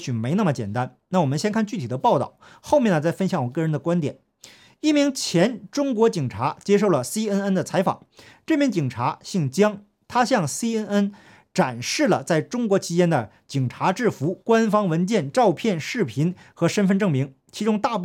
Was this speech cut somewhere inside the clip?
no; 0 cuts

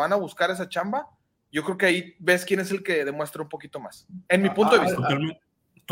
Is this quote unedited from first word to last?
yes; 0 cuts

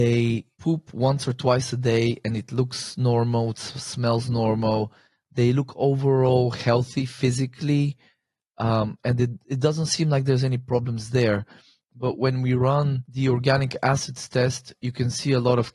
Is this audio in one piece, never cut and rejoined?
yes; 0 cuts

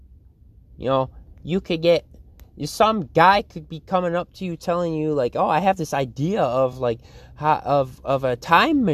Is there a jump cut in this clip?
no; 0 cuts

